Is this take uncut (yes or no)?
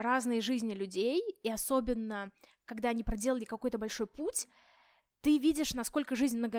yes